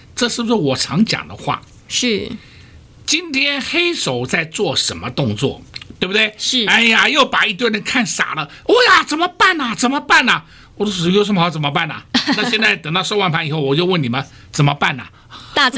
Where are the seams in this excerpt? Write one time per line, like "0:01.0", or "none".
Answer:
0:06.0

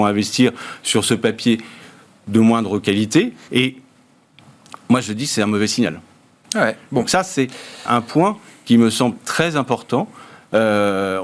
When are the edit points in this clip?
0:03.5
0:06.4
0:07.9

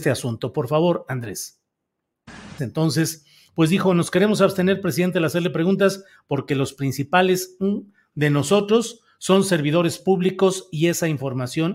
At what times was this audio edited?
0:02.6

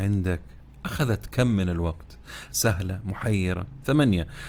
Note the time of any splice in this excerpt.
0:02.5

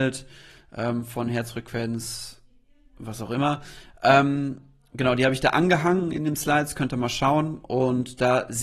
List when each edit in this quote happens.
none

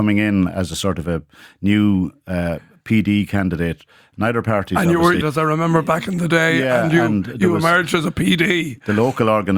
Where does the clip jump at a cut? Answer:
0:05.2

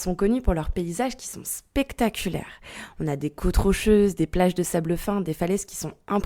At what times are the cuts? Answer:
none

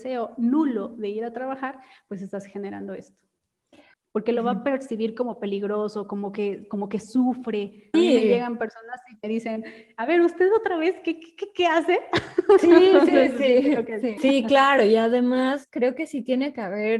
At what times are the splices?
0:04.1
0:07.9
0:14.2

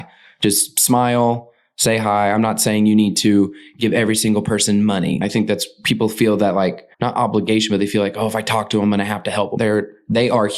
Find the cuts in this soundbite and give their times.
0:06.9
0:09.6

